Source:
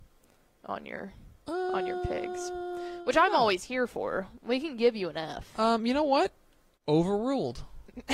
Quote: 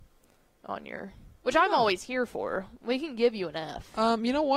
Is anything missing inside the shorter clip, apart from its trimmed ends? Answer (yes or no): yes